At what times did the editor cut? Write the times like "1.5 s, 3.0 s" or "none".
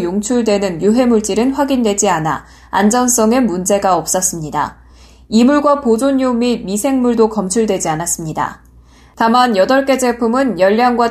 none